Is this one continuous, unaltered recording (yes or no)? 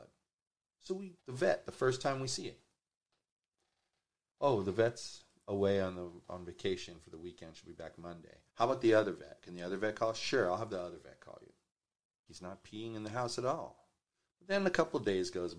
no